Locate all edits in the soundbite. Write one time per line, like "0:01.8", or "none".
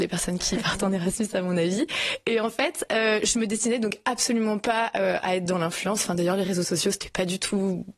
0:05.2